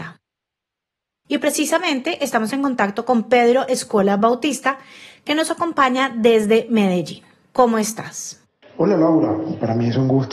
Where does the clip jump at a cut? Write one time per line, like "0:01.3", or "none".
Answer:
0:07.4